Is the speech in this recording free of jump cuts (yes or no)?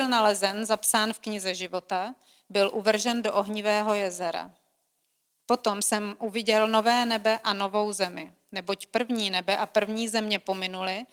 yes